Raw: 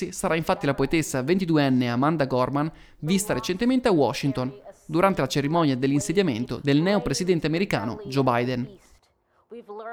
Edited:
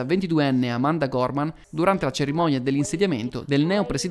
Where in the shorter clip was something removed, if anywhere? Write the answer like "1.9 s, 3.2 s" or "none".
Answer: 1.6 s